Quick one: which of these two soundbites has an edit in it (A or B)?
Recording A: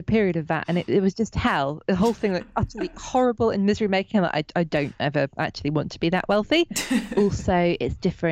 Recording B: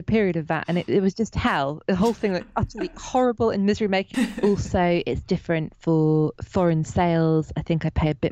B